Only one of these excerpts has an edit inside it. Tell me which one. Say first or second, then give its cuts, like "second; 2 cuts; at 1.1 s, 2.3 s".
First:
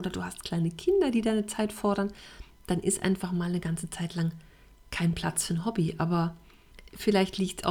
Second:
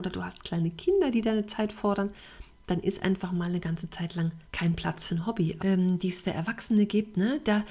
second; 2 cuts; at 4.4 s, 5.6 s